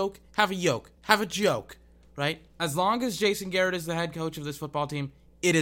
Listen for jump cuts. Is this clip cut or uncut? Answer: cut